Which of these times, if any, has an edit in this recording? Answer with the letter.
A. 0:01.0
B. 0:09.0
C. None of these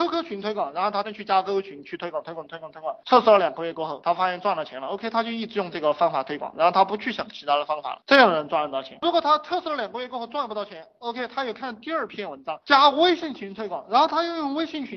A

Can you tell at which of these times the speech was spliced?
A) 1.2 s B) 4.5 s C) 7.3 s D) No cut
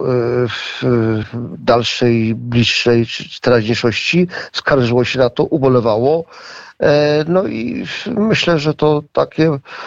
A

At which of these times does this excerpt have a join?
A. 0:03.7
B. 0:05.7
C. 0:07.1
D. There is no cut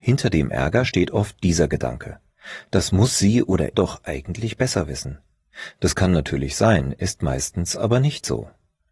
A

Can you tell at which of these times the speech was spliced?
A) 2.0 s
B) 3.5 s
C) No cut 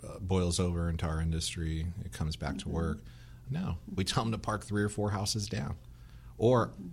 B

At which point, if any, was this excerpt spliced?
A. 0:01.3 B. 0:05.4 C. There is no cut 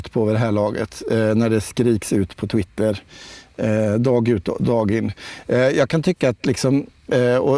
C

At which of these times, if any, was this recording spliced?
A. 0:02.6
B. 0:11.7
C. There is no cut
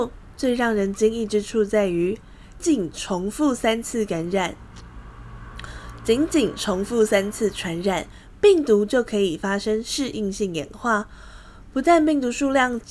A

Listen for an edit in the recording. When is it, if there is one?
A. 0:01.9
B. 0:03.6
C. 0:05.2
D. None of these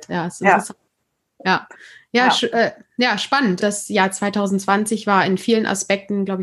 B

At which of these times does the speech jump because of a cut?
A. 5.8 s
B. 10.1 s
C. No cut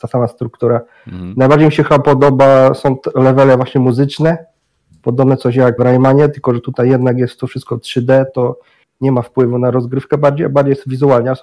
A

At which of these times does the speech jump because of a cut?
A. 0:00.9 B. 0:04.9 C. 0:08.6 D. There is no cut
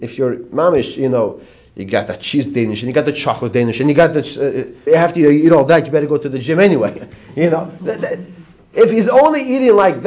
B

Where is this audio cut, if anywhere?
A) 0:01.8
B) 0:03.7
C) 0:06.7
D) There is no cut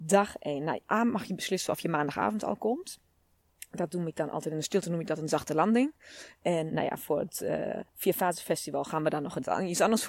C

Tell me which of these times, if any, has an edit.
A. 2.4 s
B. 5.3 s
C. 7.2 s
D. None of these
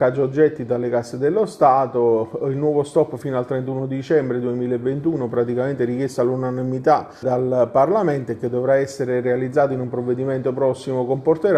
C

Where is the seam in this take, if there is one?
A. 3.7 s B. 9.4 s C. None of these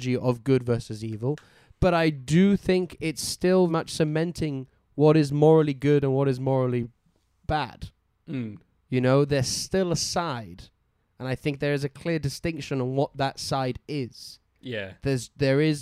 A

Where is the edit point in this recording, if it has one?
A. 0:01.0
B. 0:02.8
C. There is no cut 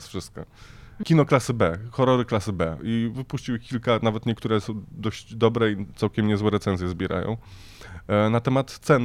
A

